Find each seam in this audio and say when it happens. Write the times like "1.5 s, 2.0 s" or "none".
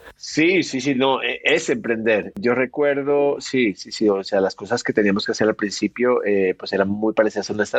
none